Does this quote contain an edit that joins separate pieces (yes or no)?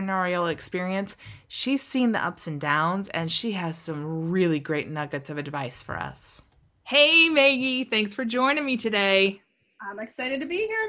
no